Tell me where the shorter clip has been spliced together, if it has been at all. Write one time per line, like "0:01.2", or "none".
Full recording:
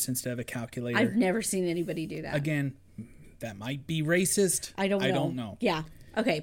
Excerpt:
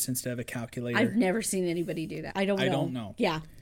0:02.3